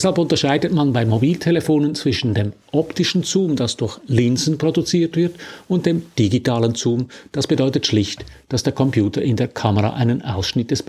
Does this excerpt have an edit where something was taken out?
no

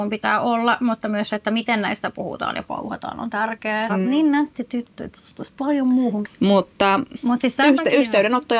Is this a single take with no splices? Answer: no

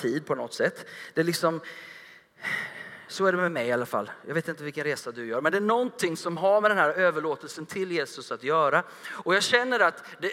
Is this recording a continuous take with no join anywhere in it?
yes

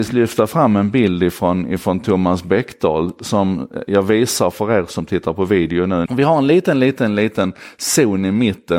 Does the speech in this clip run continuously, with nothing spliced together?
no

